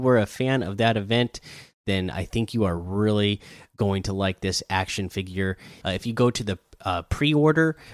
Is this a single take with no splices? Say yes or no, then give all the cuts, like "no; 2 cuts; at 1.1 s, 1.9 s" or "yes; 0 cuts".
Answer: no; 1 cut; at 5.8 s